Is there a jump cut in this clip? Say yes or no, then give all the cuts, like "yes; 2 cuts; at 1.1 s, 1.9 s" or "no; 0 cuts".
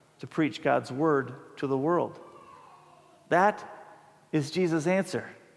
no; 0 cuts